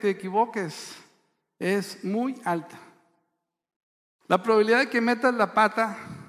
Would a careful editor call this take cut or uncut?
uncut